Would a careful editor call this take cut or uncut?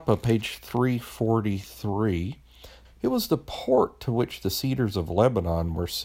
cut